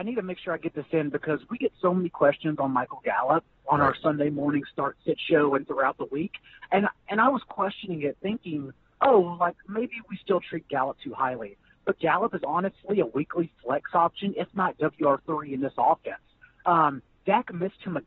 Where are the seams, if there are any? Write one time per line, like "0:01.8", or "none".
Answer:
none